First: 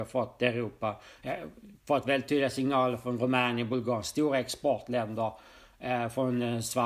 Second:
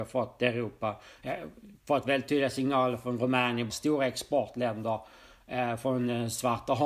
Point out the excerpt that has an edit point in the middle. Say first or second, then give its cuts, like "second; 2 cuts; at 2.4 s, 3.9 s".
second; 1 cut; at 3.7 s